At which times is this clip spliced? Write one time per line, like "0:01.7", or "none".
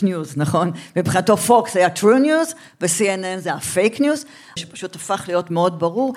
0:04.6